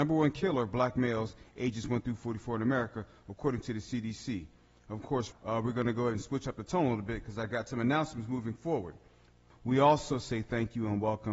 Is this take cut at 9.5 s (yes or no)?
yes